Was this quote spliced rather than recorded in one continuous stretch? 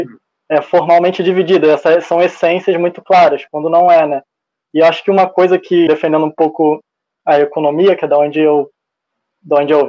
yes; 1 cut; at 5.9 s

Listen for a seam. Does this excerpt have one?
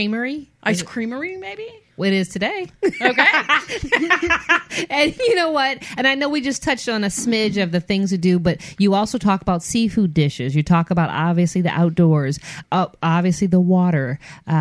yes; 1 cut; at 12.6 s

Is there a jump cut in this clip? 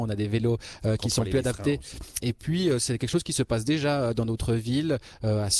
yes; 1 cut; at 2.2 s

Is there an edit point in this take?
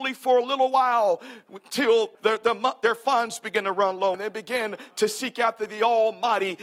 yes; 2 cuts; at 2.1 s, 4.1 s

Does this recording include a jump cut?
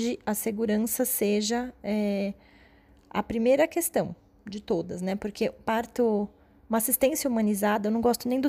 no; 0 cuts

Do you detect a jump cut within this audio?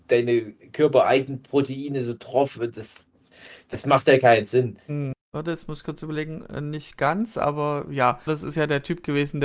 yes; 2 cuts; at 5.1 s, 8.3 s

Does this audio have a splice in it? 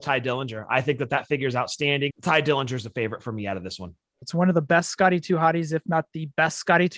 yes; 2 cuts; at 2.1 s, 4.2 s

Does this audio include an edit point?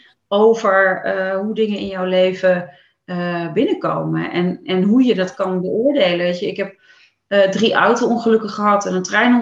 no; 0 cuts

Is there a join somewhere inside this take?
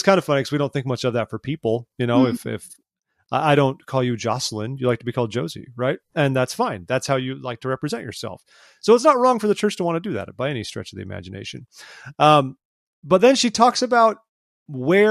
no; 0 cuts

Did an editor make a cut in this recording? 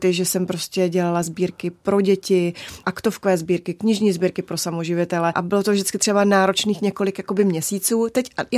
yes; 2 cuts; at 2.8 s, 5.3 s

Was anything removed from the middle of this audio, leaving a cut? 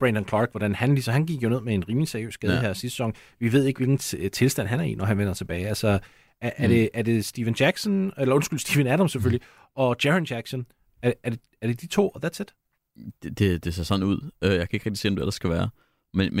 no; 0 cuts

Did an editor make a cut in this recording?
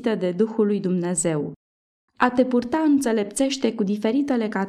yes; 1 cut; at 2.1 s

